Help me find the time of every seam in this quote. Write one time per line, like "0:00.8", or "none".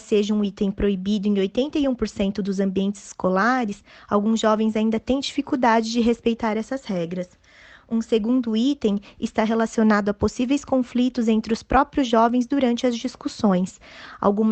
none